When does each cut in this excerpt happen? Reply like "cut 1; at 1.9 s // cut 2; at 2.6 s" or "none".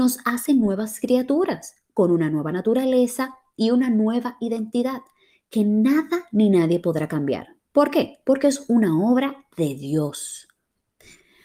none